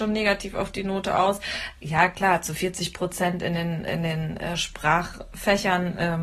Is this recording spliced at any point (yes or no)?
no